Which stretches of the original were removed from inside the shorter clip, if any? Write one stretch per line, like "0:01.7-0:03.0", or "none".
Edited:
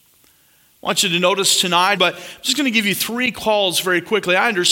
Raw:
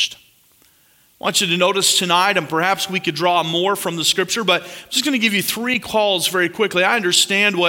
0:02.3-0:04.4

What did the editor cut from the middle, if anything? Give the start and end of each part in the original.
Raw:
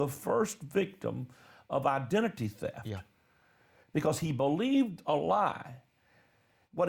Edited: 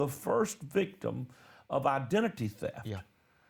none

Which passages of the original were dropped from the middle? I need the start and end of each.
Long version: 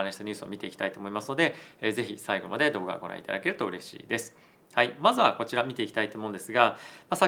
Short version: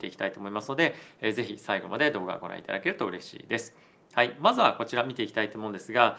none

